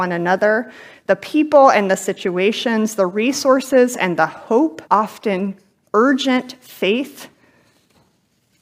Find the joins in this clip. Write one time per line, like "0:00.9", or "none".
0:04.9